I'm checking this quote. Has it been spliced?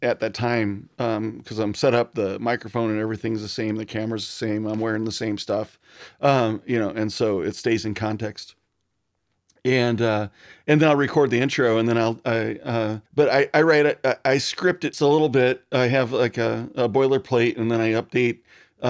yes; 2 cuts; at 13.1 s, 14.9 s

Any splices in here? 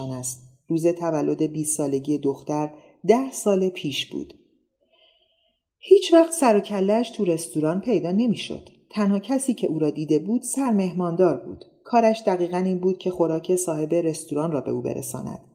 no; 0 cuts

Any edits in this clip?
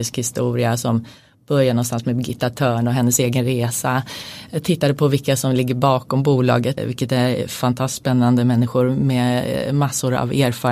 yes; 1 cut; at 6.8 s

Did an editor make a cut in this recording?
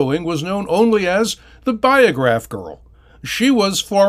no; 0 cuts

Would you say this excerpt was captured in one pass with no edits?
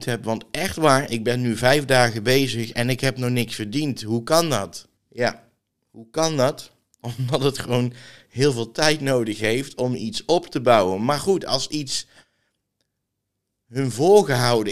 no; 2 cuts; at 1.1 s, 5.0 s

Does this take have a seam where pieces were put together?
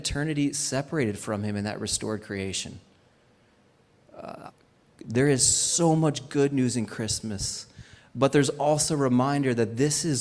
no; 0 cuts

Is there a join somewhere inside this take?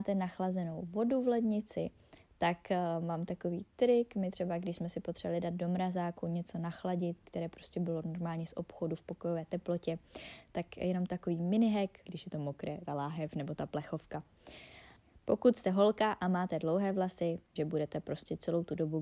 yes; 3 cuts; at 7.2 s, 12.1 s, 17.6 s

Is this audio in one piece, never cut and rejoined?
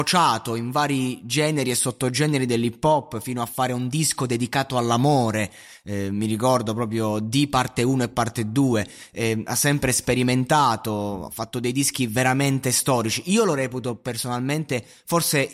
yes; 0 cuts

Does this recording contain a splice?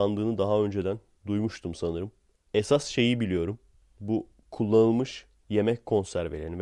no; 0 cuts

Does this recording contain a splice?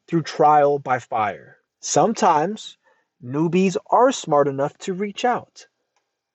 yes; 1 cut; at 1.7 s

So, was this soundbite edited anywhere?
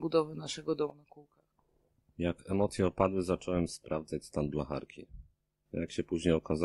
no; 0 cuts

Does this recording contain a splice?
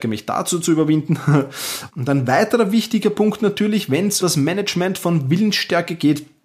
yes; 2 cuts; at 1.9 s, 4.2 s

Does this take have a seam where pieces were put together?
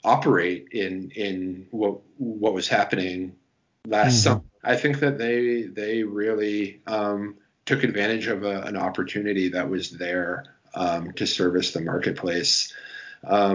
yes; 2 cuts; at 4.6 s, 11.1 s

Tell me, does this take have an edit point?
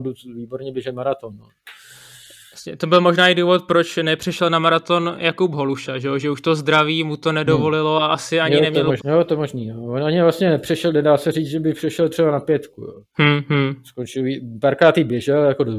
yes; 1 cut; at 9.0 s

